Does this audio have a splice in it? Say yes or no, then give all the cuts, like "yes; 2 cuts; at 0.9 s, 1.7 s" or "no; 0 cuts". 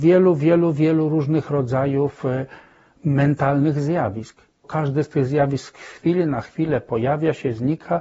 yes; 1 cut; at 4.6 s